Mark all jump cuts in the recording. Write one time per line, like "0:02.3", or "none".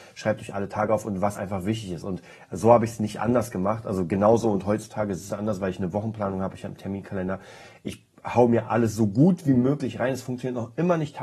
none